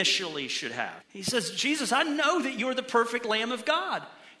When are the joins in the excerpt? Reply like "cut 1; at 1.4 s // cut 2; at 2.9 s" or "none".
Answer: cut 1; at 1.0 s